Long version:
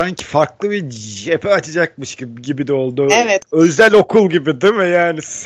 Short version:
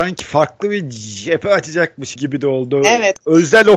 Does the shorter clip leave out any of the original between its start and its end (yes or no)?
yes